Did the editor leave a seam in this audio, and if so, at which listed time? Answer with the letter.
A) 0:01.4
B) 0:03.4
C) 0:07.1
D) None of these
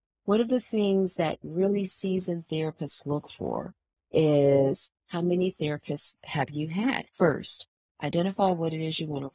C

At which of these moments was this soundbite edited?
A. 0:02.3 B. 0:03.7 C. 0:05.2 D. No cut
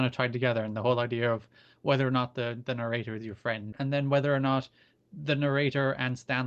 B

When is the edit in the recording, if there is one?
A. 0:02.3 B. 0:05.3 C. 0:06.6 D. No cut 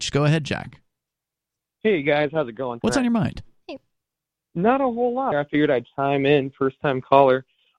B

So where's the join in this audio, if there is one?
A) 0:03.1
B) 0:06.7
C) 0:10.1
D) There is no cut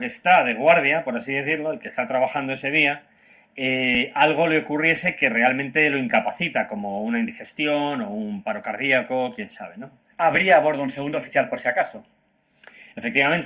C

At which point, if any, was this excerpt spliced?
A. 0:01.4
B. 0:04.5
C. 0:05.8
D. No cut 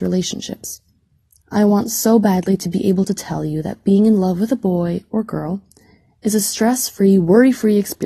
A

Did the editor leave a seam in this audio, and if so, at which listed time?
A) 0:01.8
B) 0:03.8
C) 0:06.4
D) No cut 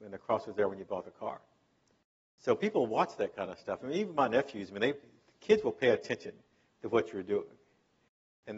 D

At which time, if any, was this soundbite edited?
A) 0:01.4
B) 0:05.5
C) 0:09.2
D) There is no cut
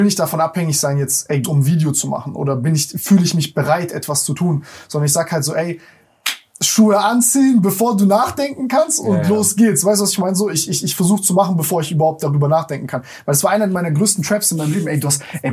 A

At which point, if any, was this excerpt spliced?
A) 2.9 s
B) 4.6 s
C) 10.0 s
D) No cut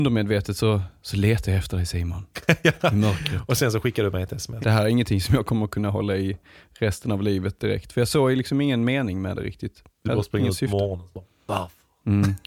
B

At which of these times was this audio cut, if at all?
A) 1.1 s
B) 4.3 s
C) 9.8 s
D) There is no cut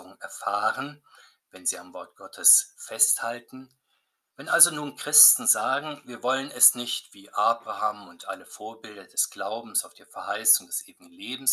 B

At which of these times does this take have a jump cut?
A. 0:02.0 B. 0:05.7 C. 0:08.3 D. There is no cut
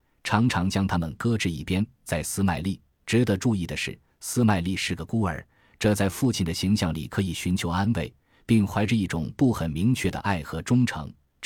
D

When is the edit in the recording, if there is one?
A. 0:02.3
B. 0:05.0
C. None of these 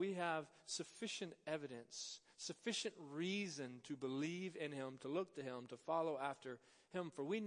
B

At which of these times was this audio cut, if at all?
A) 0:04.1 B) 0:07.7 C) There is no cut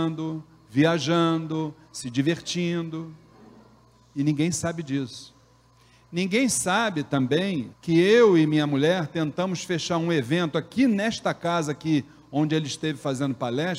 B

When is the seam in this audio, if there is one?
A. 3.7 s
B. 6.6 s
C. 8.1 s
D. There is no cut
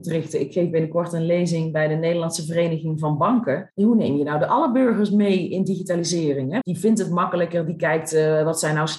B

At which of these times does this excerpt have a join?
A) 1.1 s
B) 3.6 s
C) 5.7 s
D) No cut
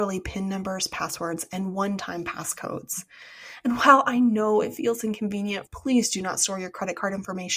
C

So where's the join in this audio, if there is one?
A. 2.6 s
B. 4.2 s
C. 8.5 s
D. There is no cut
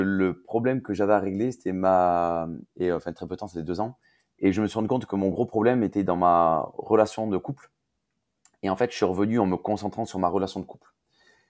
A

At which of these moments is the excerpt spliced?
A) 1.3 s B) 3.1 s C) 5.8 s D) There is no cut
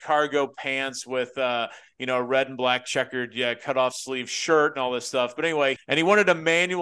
C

